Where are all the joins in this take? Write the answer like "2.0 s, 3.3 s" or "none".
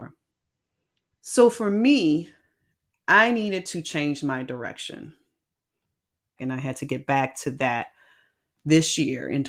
1.1 s, 6.4 s